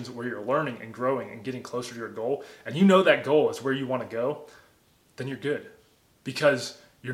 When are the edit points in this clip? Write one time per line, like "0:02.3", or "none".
none